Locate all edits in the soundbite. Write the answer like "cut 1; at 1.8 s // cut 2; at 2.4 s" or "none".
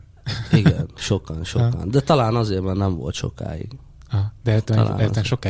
cut 1; at 1.0 s